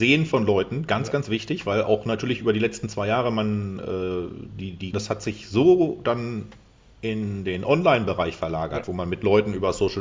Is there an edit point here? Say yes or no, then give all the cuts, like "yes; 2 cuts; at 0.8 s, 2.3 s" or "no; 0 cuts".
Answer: yes; 1 cut; at 4.9 s